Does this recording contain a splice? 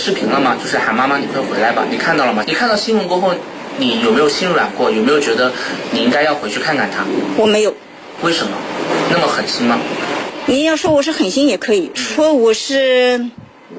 yes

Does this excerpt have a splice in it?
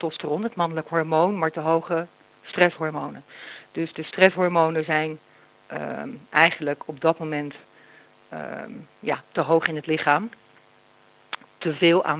no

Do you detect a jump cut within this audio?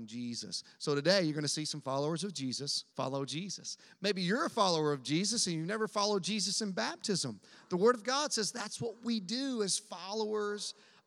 yes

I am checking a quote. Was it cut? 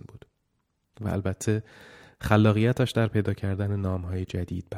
yes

